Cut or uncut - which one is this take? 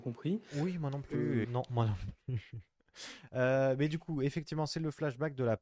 cut